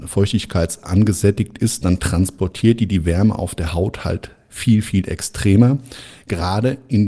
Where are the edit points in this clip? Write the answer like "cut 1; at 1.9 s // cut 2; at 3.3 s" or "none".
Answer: none